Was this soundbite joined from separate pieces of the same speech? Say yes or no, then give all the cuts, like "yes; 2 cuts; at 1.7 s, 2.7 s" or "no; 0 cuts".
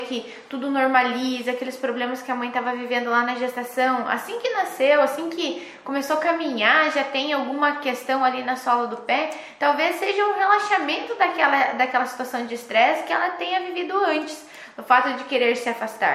no; 0 cuts